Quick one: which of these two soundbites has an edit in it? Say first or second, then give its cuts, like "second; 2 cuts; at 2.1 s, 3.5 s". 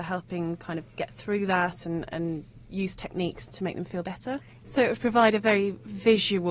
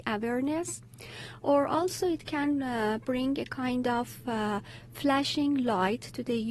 first; 2 cuts; at 3.5 s, 4.6 s